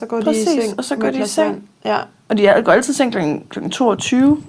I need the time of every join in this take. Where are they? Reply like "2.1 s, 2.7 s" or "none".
none

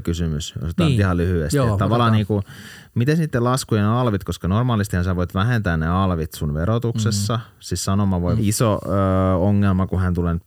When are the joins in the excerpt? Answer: 8.4 s

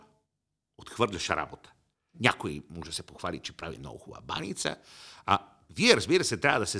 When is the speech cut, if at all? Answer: 2.1 s

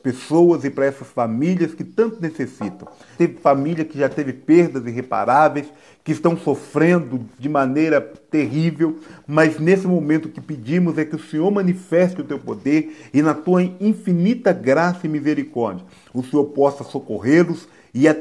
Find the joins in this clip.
3.2 s

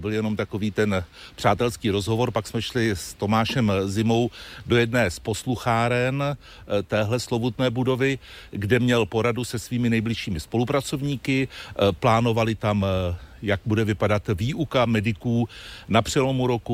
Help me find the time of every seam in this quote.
none

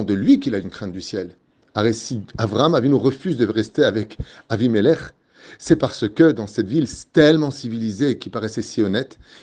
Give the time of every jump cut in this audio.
none

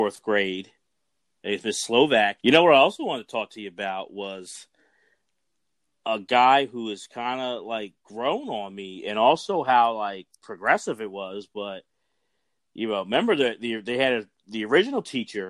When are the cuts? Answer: 2.4 s

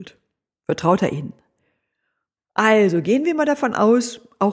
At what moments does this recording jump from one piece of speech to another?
2.4 s

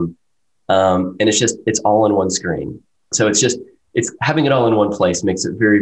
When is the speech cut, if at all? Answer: 3.1 s

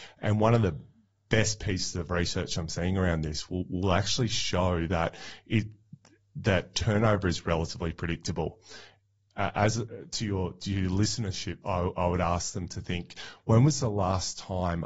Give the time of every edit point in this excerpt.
11.6 s

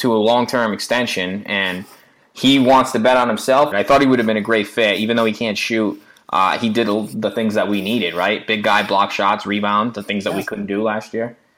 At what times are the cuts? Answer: 3.7 s

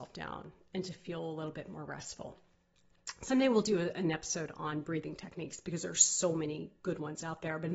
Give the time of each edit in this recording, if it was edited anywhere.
none

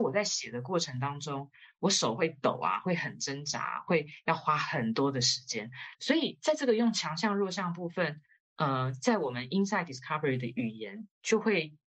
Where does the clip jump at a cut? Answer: 5.9 s

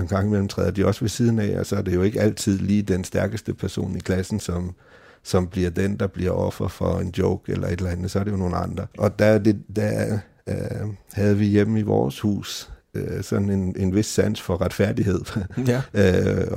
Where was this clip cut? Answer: 8.9 s

